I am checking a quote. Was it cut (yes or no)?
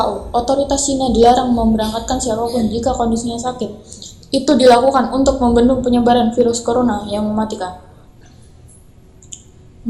no